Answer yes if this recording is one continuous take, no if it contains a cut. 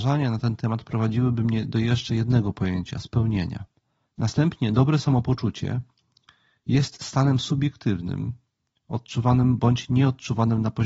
no